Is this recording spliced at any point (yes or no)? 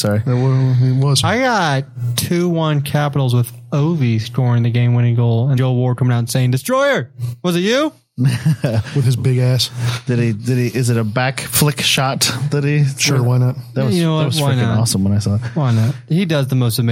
yes